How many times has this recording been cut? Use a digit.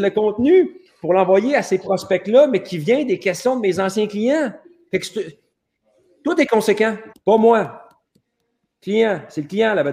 1